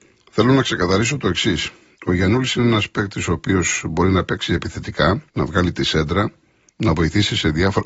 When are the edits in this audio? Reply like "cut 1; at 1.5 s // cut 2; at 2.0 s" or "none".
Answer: cut 1; at 5.3 s // cut 2; at 6.7 s